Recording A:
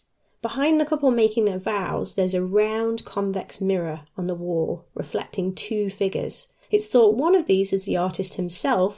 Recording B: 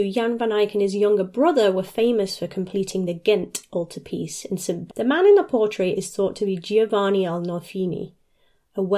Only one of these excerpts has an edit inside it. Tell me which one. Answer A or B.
B